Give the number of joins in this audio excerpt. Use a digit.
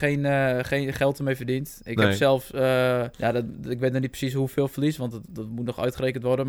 1